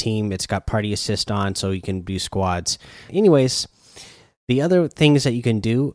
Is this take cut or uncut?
cut